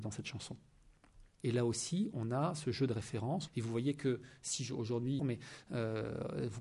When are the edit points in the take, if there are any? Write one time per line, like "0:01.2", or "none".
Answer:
0:01.4
0:03.5
0:05.2